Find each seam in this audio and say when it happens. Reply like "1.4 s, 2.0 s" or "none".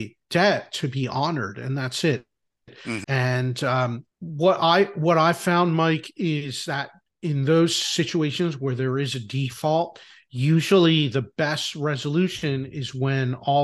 3.0 s, 4.1 s